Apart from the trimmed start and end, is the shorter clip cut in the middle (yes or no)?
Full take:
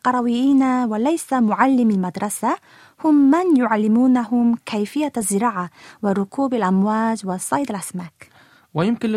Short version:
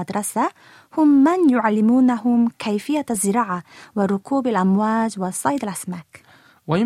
no